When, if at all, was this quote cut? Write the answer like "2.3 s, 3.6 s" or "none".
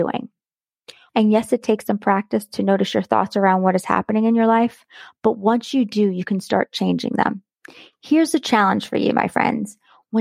1.1 s

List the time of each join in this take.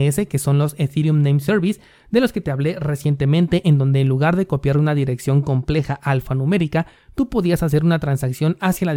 none

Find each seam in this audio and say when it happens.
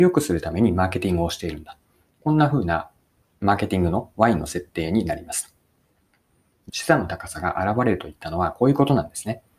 6.7 s

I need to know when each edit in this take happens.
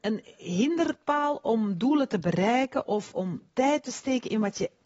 3.5 s

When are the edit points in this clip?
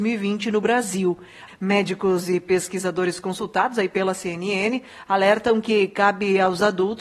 1.5 s

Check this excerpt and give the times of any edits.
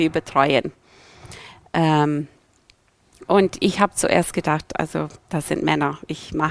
none

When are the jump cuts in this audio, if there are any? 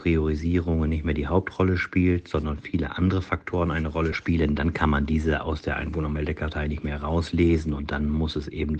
none

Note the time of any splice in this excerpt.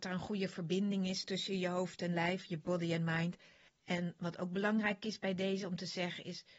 3.7 s

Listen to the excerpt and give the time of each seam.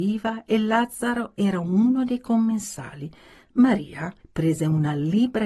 4.2 s

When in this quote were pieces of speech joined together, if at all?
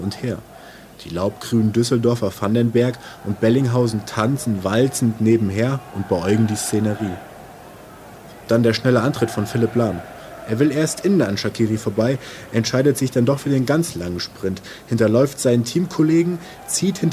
0.9 s

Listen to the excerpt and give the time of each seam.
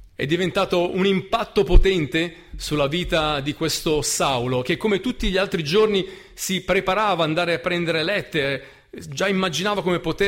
none

